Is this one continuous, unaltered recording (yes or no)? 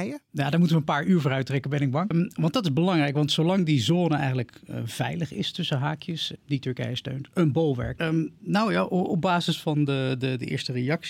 no